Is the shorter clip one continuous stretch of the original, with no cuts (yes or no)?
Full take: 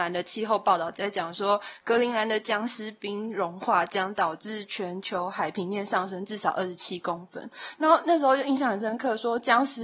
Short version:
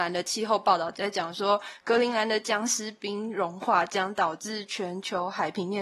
yes